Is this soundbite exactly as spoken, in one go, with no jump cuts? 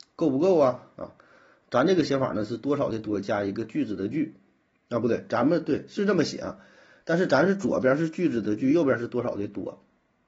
yes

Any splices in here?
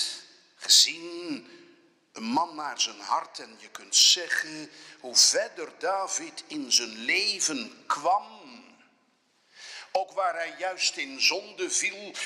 no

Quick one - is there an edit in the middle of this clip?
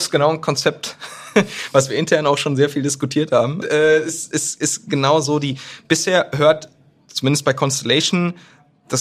yes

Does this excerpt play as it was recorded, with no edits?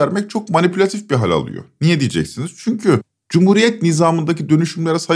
yes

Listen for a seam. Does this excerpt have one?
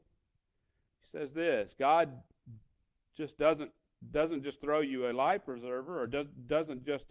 no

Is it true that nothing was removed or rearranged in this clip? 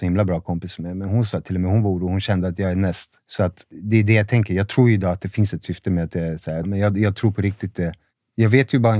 no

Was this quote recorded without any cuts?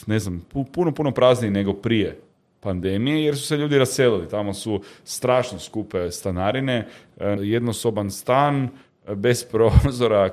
no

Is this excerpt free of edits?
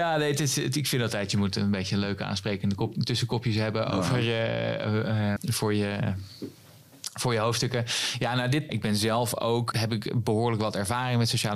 no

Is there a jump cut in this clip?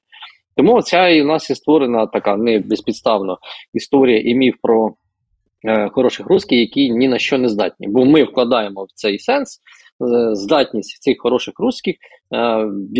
no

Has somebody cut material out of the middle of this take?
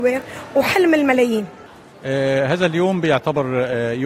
no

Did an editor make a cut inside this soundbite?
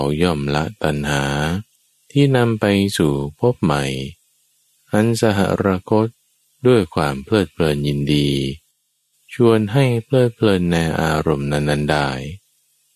no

